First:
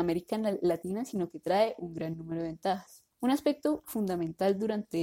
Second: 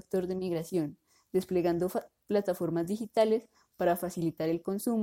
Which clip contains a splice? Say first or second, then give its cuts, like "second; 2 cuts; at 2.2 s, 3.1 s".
first; 1 cut; at 3.1 s